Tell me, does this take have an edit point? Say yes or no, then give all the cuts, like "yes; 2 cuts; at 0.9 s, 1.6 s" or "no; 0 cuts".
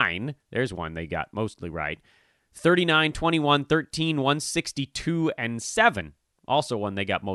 no; 0 cuts